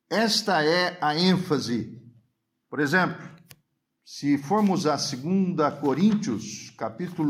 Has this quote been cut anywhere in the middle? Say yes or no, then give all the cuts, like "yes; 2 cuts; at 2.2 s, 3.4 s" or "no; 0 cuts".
yes; 1 cut; at 2.6 s